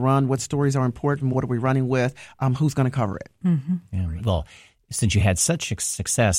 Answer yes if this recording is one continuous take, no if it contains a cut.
no